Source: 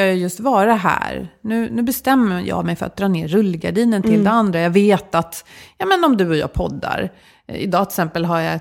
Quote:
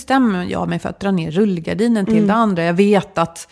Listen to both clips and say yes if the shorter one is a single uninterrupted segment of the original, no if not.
yes